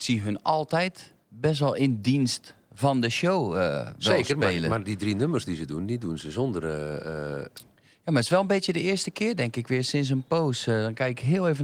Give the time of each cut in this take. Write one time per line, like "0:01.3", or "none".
none